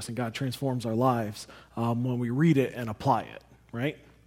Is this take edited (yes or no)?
no